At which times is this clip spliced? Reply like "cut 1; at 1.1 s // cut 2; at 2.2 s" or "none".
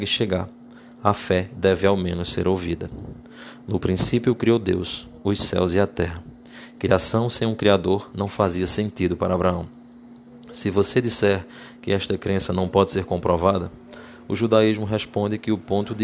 none